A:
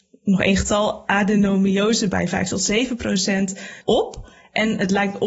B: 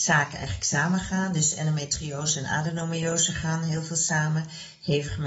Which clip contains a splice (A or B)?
A